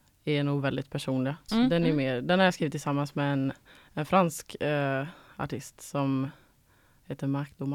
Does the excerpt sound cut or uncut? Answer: cut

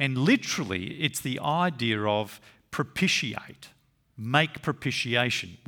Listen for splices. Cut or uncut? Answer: uncut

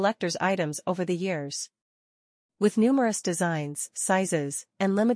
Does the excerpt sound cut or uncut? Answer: uncut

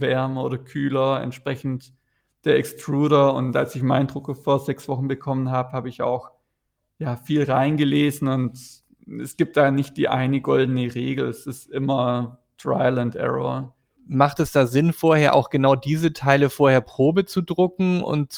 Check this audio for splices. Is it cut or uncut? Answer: cut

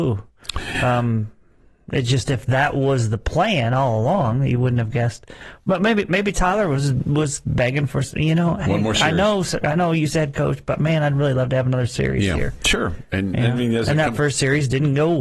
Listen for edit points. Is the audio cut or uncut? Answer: uncut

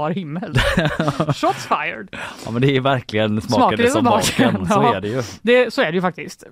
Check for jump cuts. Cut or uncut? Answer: uncut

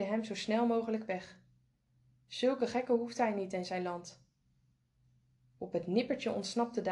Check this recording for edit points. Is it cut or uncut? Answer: uncut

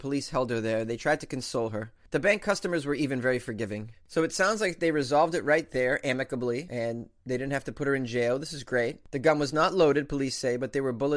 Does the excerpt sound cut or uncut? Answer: uncut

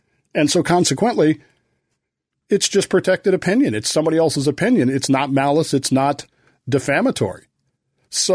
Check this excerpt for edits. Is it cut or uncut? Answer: uncut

